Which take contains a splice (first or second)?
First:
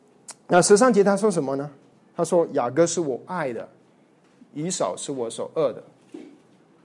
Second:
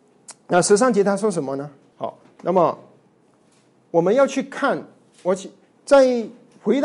second